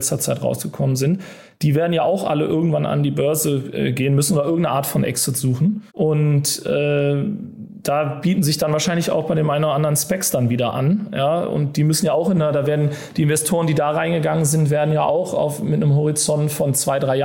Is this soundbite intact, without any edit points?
no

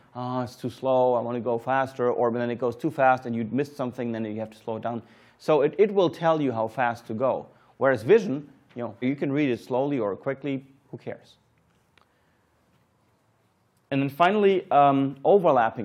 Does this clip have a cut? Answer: yes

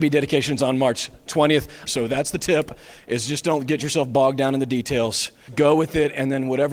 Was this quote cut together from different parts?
yes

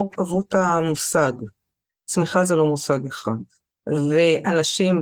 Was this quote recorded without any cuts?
yes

